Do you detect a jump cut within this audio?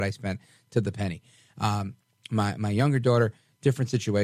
no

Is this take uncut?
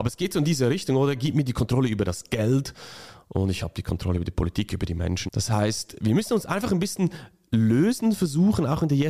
no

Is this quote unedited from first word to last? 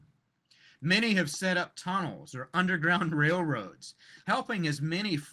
no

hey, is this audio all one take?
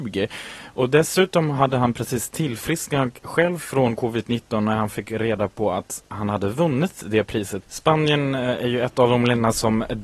no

